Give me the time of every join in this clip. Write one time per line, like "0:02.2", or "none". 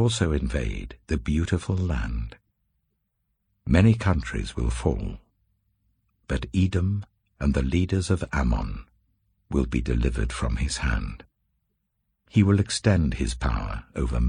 0:07.3